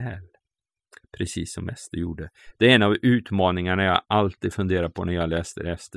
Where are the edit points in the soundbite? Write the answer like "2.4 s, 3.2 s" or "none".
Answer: none